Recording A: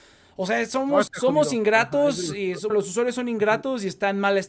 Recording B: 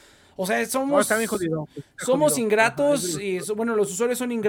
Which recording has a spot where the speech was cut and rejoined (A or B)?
A